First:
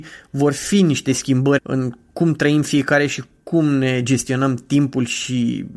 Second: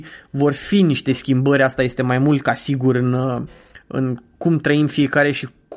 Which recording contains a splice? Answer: first; 1 cut; at 1.6 s

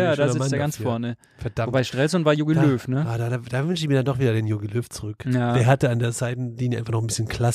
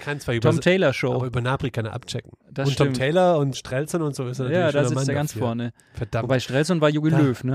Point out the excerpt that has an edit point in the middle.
second; 1 cut; at 3.5 s

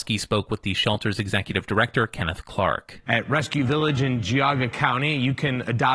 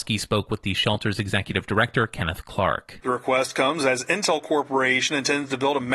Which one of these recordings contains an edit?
second; 1 cut; at 3.0 s

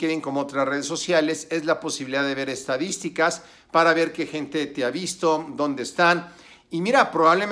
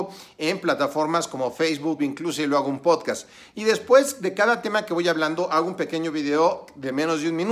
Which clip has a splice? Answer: second; 1 cut; at 2.0 s

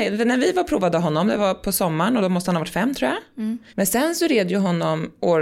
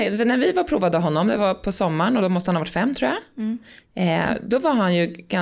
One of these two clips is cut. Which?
first; 1 cut; at 3.7 s

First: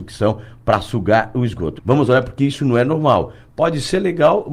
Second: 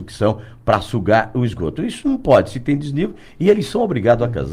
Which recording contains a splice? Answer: first; 1 cut; at 1.8 s

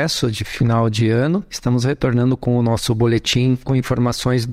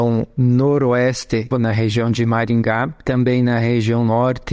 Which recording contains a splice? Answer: second; 1 cut; at 1.5 s

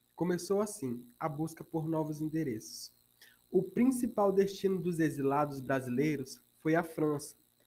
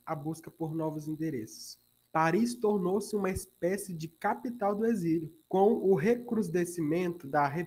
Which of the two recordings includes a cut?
second; 2 cuts; at 2.1 s, 5.4 s

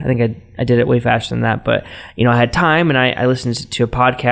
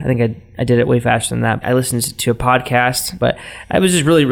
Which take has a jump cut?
second; 2 cuts; at 1.6 s, 3.2 s

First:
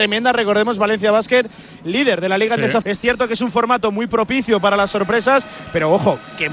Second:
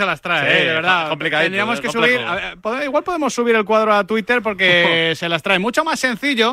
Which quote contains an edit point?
first; 1 cut; at 2.8 s

